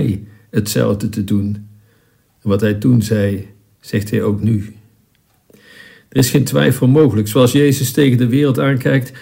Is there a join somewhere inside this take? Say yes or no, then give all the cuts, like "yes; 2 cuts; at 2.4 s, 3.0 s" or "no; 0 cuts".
no; 0 cuts